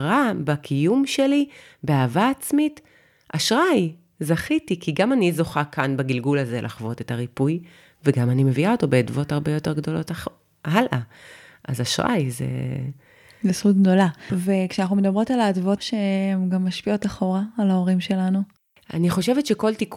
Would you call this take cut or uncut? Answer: cut